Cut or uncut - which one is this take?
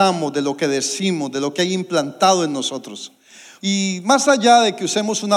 cut